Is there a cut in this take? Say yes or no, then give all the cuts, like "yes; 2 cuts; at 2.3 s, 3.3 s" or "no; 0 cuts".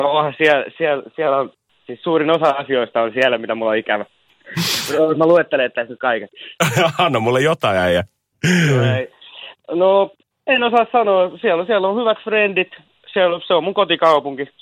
no; 0 cuts